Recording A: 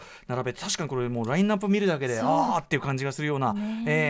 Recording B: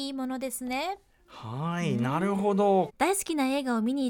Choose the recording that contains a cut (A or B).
B